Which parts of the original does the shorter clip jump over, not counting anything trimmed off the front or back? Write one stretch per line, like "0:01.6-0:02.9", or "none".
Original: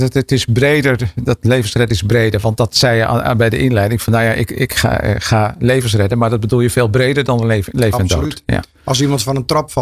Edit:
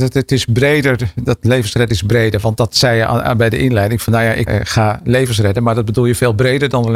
0:04.5-0:05.0